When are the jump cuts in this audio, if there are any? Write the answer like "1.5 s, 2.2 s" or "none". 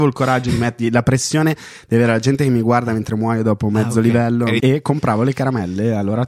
4.6 s